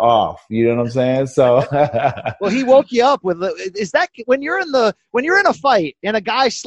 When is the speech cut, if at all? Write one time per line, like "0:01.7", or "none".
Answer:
none